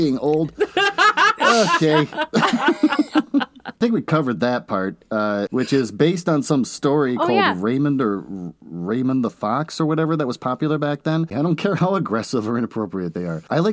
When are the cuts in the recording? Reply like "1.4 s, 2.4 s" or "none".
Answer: 5.5 s, 11.3 s

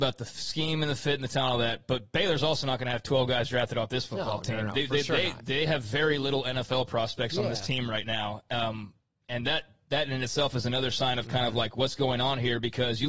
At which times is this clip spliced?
none

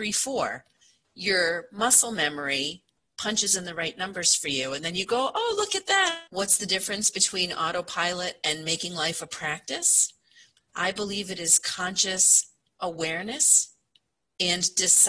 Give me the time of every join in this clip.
6.3 s, 10.6 s

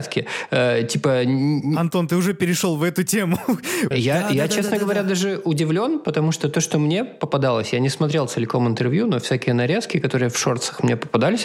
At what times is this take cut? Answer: 3.9 s

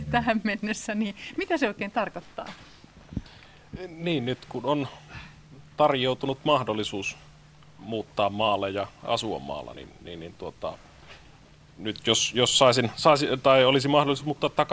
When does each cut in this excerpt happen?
none

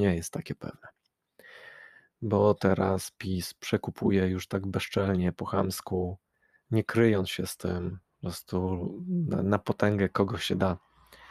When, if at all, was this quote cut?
none

